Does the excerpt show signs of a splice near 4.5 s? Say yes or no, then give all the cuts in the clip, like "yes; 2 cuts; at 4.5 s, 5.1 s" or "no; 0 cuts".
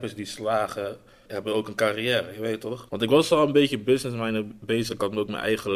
no; 2 cuts; at 1.3 s, 2.9 s